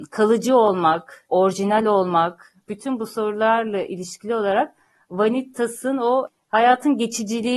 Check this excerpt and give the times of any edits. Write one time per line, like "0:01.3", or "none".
0:02.7